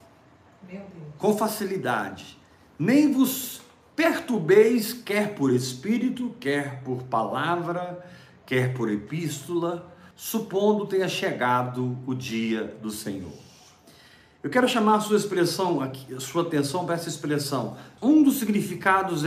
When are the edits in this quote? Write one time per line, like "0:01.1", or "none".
0:10.1
0:18.0